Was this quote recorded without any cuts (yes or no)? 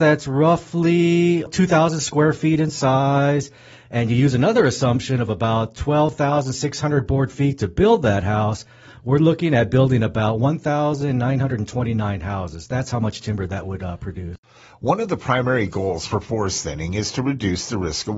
no